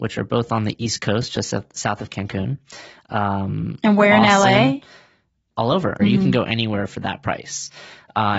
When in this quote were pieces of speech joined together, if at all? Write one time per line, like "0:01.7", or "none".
0:03.1
0:06.0